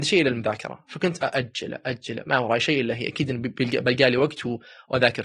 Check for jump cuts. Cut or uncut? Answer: uncut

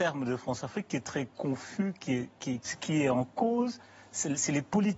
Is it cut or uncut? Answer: cut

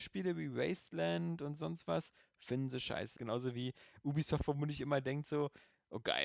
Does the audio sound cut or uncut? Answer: cut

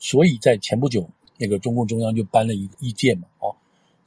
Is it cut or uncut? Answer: cut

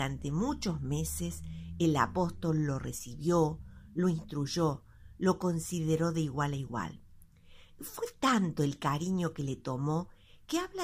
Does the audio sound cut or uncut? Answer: cut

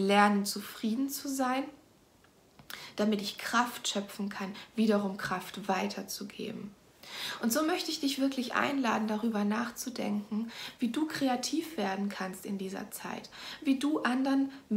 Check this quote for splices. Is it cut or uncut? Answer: uncut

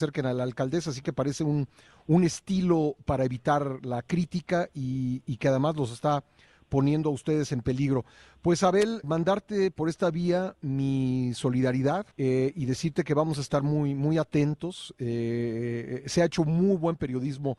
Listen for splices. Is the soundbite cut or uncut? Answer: cut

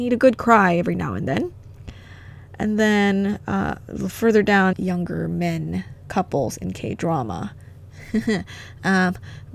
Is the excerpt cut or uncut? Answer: cut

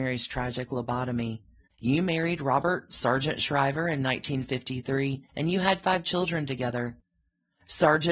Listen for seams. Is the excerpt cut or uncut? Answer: cut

